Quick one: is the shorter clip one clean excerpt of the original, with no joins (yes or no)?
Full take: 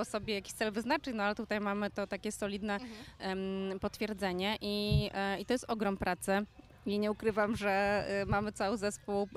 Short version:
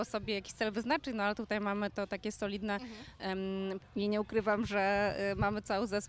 no